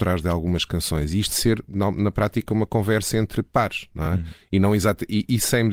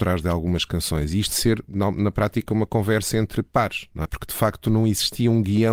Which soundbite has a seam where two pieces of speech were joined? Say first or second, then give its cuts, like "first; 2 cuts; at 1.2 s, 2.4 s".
second; 1 cut; at 4.1 s